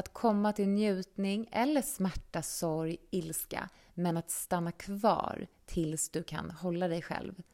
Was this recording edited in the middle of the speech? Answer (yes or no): no